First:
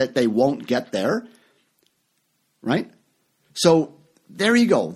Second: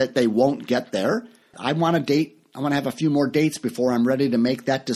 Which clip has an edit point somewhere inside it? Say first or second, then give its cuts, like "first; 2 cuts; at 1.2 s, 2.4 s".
second; 1 cut; at 1.5 s